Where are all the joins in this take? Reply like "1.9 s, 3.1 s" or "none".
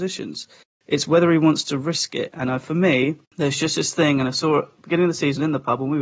3.2 s